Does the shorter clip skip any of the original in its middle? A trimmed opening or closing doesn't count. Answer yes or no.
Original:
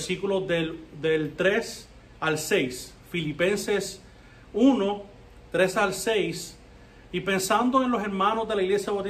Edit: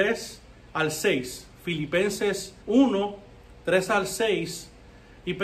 yes